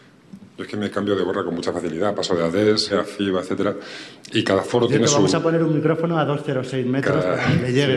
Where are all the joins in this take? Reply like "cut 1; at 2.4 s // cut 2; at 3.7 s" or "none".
cut 1; at 2.9 s